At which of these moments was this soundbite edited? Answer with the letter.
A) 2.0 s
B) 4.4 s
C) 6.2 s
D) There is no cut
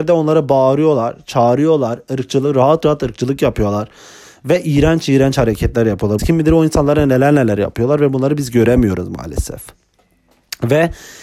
C